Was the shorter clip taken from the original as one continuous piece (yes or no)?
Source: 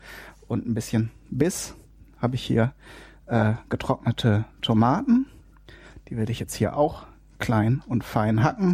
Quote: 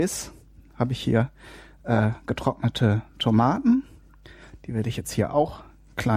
yes